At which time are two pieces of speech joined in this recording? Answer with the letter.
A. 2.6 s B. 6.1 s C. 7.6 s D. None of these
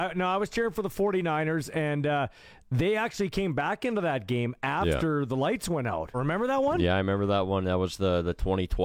B